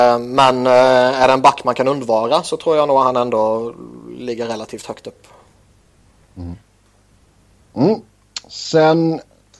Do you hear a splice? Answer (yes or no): no